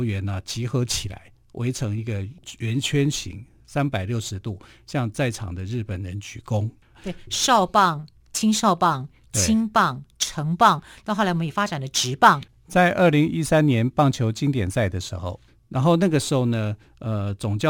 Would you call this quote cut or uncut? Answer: cut